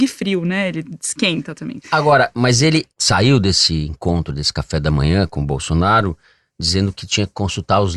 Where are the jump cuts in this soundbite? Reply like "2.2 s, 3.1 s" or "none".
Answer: none